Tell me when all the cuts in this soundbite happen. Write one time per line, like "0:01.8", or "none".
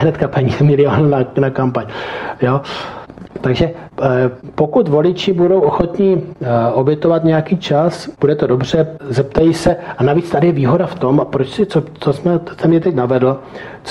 none